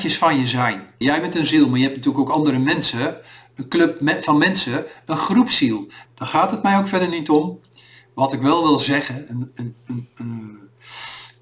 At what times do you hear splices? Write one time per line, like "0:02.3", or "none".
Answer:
0:01.0
0:06.1